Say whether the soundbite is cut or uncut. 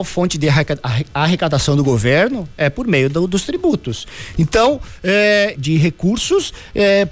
cut